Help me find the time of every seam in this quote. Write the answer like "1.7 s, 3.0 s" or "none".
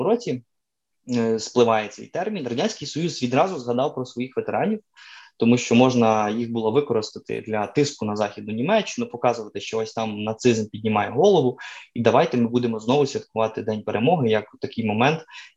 none